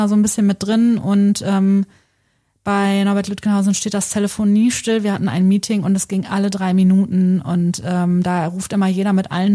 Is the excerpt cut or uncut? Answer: uncut